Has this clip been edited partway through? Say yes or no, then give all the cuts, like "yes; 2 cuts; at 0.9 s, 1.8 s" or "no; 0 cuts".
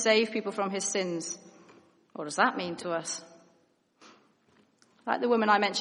no; 0 cuts